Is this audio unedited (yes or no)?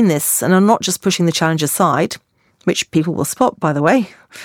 yes